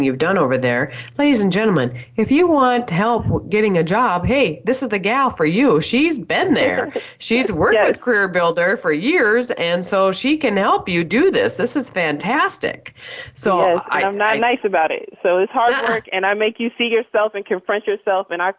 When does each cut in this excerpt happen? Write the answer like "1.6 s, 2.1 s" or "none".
none